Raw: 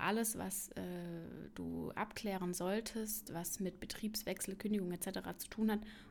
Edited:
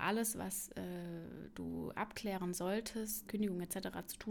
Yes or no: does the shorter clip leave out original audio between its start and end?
yes